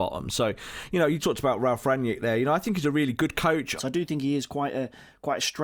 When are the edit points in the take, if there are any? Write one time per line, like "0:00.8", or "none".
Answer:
0:01.2
0:03.8